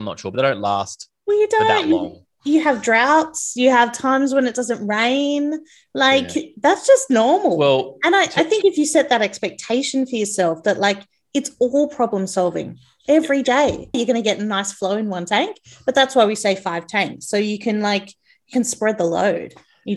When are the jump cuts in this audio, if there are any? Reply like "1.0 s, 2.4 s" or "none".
13.9 s